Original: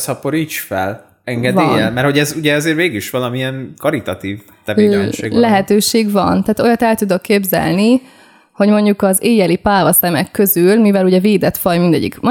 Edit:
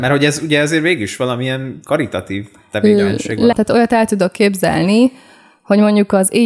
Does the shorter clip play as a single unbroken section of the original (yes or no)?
no